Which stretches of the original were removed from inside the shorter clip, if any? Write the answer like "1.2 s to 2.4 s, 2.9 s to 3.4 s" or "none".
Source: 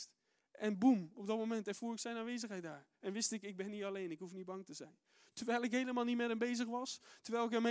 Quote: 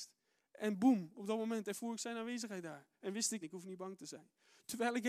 3.4 s to 4.1 s